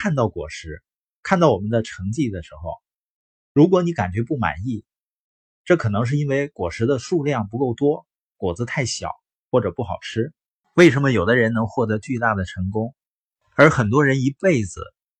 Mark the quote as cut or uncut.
cut